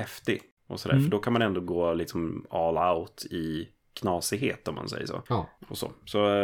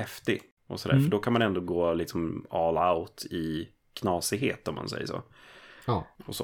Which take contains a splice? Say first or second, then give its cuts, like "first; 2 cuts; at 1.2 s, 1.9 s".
first; 1 cut; at 5.3 s